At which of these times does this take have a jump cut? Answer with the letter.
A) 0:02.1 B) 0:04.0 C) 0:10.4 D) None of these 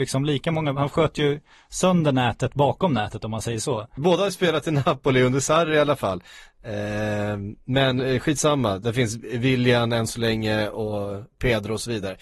B